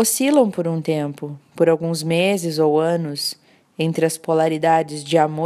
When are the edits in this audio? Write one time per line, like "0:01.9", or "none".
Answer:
none